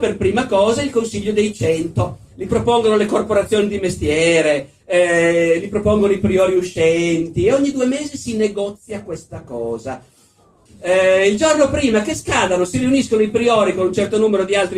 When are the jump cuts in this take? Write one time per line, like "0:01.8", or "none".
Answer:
0:02.3
0:10.7